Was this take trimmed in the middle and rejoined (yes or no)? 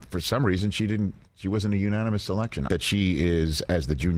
yes